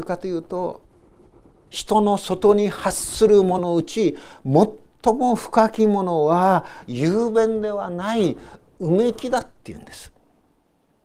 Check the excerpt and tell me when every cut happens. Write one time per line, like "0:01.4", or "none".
0:03.6